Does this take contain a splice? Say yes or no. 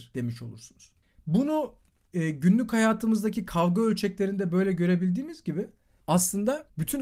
no